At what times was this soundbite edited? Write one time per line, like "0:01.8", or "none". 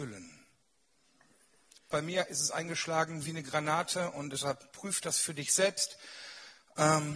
0:01.9